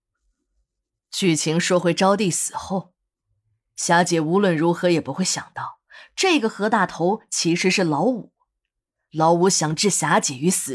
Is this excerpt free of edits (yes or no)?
yes